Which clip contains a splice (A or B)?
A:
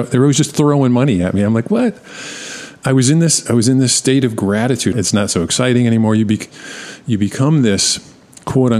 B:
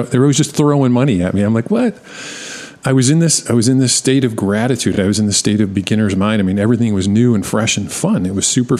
A